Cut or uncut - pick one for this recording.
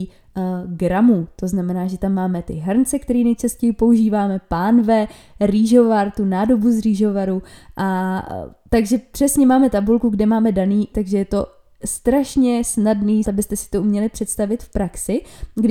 cut